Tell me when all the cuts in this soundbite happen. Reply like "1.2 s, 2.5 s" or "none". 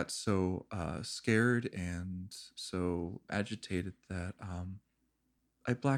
none

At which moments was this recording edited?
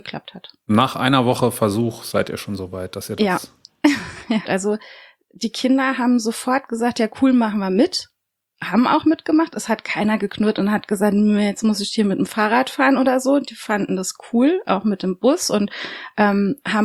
4.5 s

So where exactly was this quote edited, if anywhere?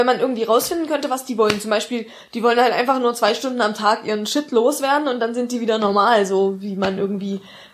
none

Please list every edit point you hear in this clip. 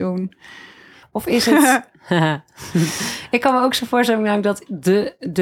1.0 s

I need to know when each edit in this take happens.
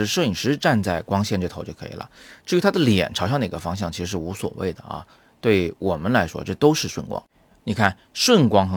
none

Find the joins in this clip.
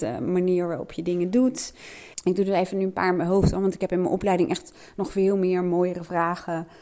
2.1 s

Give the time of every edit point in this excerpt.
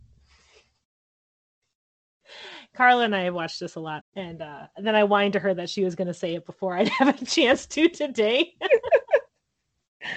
4.0 s

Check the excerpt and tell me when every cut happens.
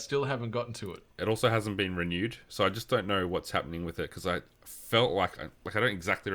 1.1 s

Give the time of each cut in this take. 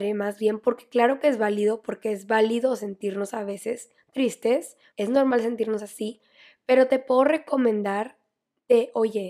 4.9 s

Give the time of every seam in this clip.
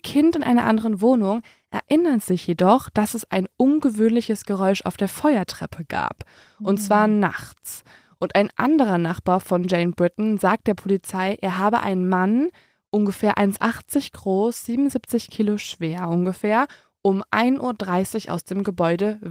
none

